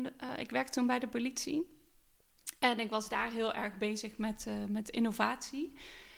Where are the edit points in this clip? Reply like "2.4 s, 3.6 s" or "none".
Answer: none

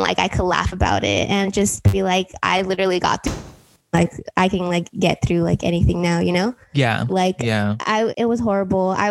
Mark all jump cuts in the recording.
7.1 s, 8.1 s

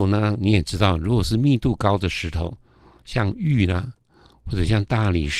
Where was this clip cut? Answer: none

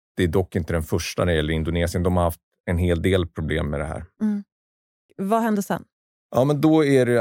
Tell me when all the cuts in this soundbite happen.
5.1 s

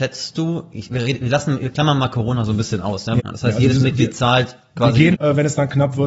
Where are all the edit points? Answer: 3.2 s, 5.1 s

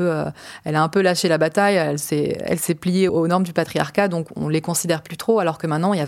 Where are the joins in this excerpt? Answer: 3.1 s

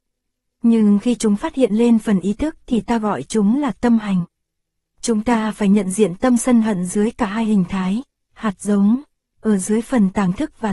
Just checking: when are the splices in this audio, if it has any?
none

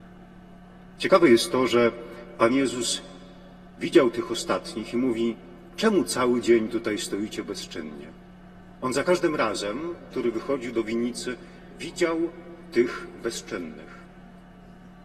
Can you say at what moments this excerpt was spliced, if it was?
1.0 s, 10.1 s

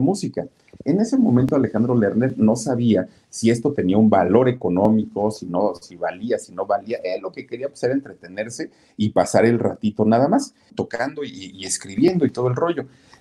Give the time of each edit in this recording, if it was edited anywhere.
10.7 s

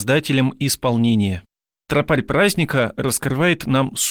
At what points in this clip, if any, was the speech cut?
none

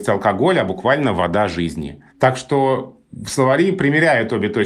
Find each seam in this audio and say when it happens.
2.1 s

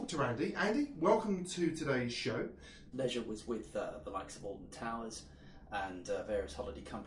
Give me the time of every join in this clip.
2.9 s

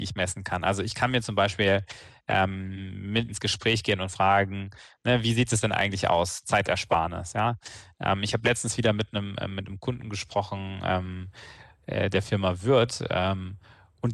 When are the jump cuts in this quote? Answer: 3.3 s

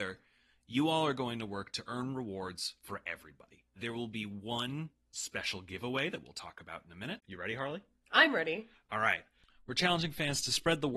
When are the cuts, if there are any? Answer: 7.2 s

